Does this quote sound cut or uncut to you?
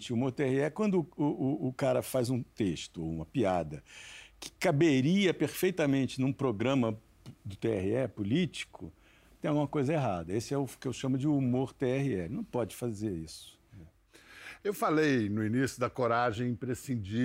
uncut